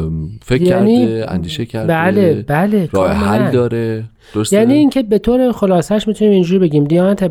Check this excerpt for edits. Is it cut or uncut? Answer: uncut